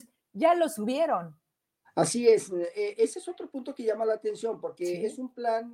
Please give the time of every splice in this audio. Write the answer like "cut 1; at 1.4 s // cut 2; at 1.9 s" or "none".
none

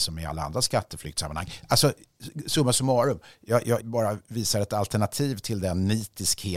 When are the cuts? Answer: cut 1; at 3.8 s

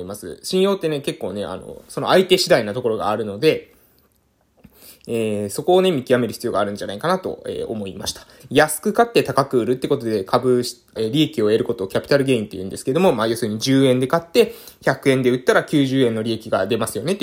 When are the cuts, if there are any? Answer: cut 1; at 8.4 s // cut 2; at 11.0 s

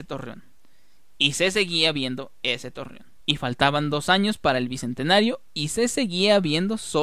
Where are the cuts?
cut 1; at 3.2 s

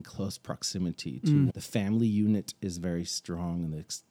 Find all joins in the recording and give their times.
cut 1; at 1.5 s

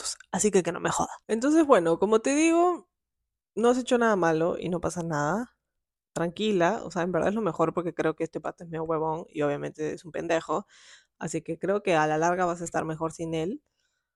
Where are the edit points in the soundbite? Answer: none

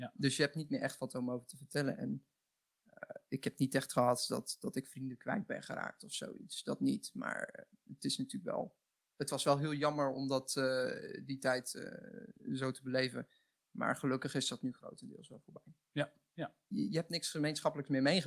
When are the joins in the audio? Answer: cut 1; at 16.7 s

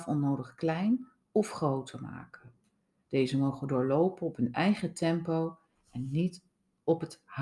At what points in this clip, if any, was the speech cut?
cut 1; at 3.0 s

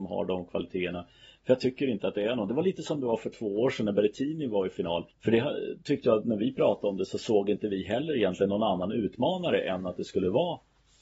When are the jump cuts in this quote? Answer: cut 1; at 5.1 s

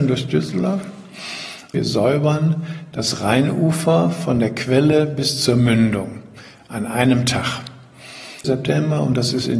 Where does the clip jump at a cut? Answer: cut 1; at 1.7 s // cut 2; at 8.4 s

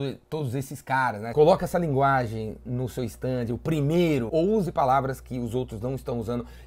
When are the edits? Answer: cut 1; at 1.3 s // cut 2; at 4.3 s

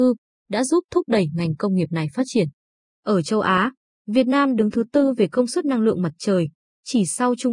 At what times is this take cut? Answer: none

